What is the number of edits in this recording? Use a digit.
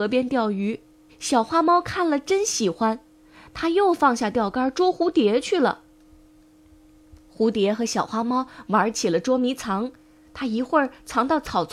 1